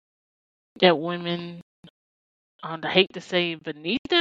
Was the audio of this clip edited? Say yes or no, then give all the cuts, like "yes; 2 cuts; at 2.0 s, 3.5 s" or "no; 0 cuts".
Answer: no; 0 cuts